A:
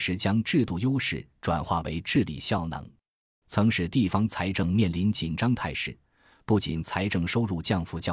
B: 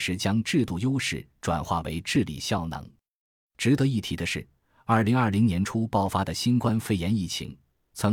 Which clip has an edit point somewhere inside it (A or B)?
A